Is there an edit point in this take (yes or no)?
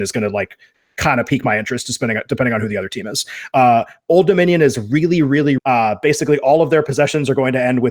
yes